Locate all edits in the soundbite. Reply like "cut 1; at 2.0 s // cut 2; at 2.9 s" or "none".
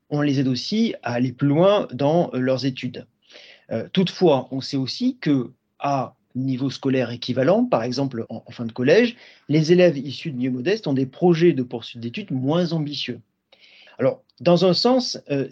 cut 1; at 8.3 s // cut 2; at 13.9 s

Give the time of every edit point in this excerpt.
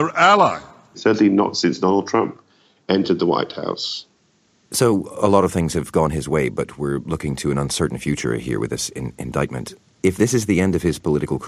cut 1; at 0.9 s

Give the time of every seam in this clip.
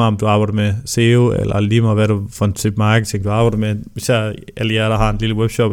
none

